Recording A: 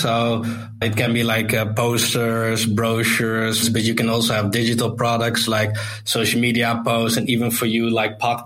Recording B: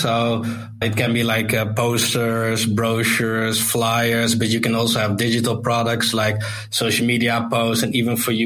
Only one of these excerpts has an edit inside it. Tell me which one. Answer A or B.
A